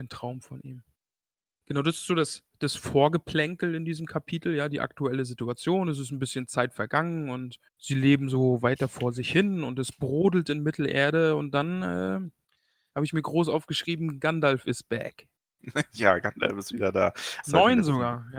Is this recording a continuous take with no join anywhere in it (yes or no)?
no